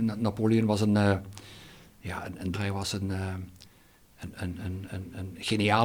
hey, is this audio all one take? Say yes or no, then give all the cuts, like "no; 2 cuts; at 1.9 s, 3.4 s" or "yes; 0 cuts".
no; 1 cut; at 2.5 s